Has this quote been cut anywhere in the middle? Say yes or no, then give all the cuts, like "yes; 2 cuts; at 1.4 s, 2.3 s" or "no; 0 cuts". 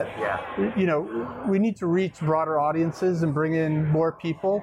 no; 0 cuts